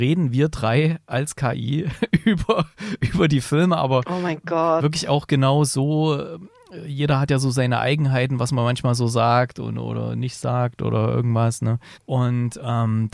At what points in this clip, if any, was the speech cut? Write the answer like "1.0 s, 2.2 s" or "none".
11.9 s